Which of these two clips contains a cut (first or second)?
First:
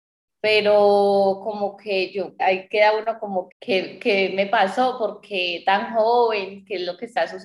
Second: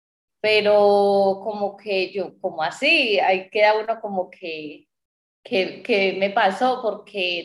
first